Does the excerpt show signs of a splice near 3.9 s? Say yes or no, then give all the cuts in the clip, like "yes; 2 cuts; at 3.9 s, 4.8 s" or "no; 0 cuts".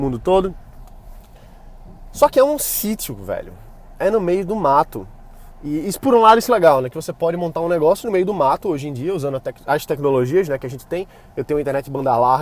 no; 1 cut; at 6.5 s